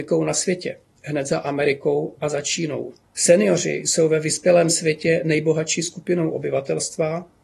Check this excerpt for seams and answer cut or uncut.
cut